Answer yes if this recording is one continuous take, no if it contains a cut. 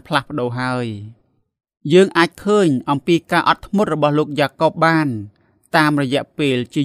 yes